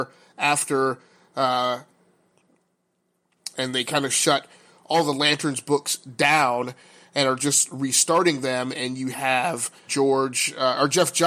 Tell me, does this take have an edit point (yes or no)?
yes